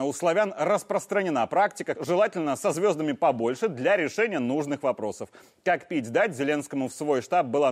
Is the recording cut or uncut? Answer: cut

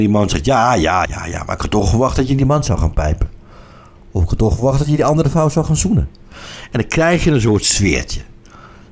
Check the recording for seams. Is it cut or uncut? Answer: cut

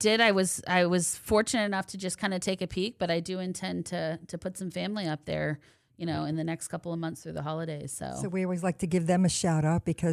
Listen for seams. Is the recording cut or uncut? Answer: uncut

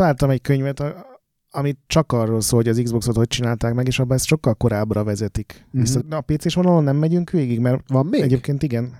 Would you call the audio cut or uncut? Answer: cut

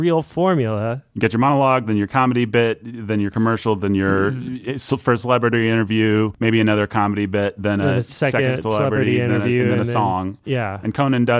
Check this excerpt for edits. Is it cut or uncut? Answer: uncut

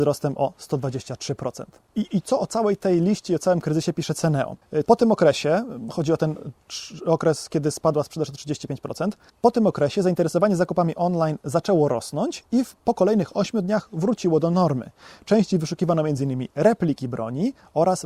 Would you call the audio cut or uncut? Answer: cut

